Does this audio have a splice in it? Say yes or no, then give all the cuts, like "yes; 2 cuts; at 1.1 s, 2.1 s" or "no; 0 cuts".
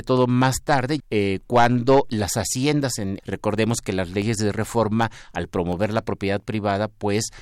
yes; 2 cuts; at 1.0 s, 3.2 s